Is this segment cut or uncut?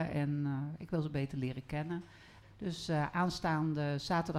cut